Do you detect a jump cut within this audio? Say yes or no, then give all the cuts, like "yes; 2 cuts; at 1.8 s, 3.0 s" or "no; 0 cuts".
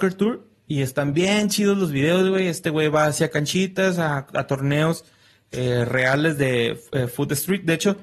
no; 0 cuts